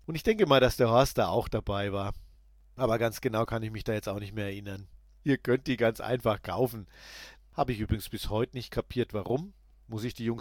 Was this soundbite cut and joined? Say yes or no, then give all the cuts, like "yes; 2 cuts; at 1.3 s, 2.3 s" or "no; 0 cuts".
yes; 2 cuts; at 5.2 s, 7.4 s